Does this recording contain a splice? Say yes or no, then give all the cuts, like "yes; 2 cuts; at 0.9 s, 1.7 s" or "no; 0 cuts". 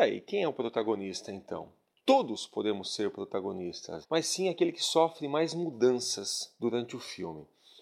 yes; 1 cut; at 4.0 s